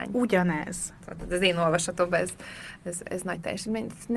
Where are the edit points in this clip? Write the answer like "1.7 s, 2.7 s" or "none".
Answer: 1.0 s